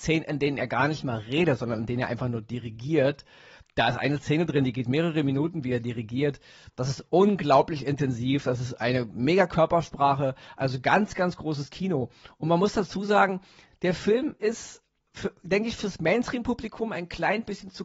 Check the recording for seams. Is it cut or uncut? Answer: uncut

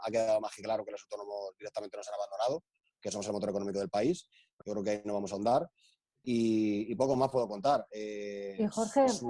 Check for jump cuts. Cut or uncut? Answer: cut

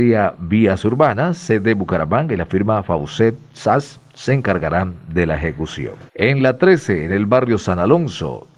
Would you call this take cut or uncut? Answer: cut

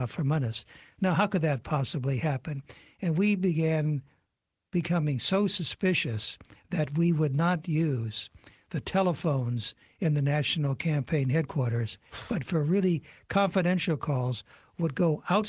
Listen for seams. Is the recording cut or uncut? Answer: uncut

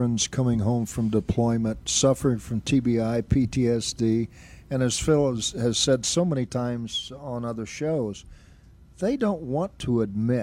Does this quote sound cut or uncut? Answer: uncut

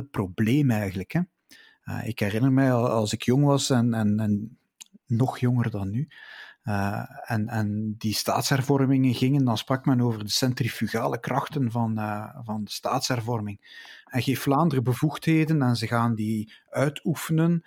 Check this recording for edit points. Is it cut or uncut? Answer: uncut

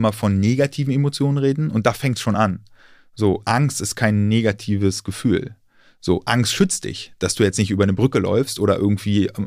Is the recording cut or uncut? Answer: uncut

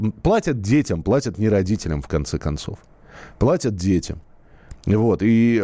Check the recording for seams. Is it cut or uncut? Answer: uncut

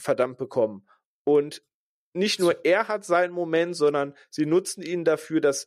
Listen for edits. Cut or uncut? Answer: uncut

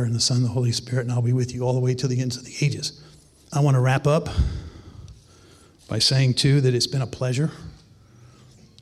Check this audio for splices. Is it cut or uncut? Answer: cut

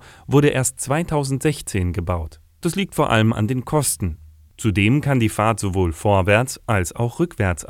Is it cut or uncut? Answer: cut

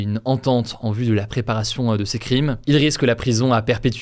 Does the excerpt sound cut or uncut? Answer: uncut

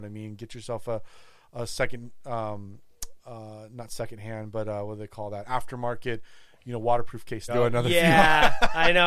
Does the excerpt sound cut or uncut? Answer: cut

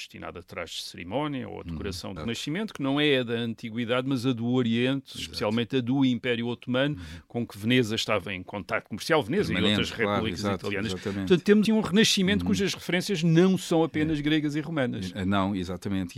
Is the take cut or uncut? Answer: cut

